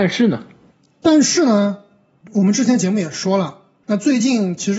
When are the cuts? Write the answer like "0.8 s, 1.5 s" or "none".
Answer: 3.8 s